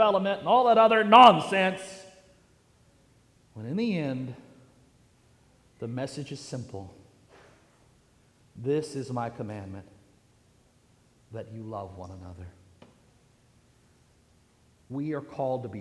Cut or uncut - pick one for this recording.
uncut